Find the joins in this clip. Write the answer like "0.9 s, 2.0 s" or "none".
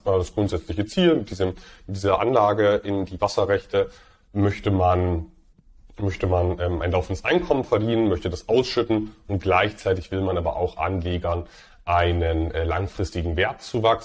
none